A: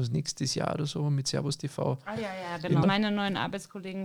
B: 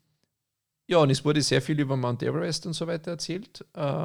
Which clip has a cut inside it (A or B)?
A